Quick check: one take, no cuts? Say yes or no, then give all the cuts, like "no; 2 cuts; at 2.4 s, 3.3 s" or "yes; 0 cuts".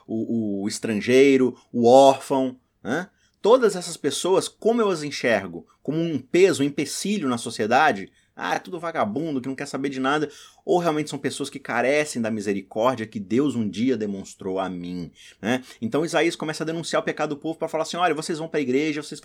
yes; 0 cuts